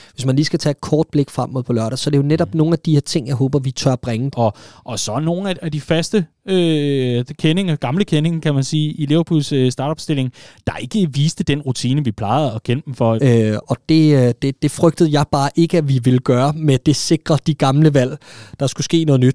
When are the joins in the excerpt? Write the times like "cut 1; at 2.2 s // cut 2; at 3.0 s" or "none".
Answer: cut 1; at 4.3 s // cut 2; at 13.2 s